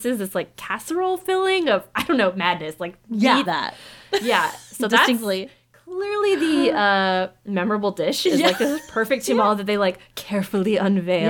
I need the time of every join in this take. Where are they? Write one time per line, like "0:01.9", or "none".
0:03.5